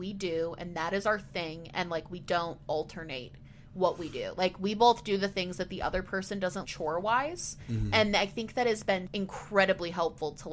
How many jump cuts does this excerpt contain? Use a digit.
2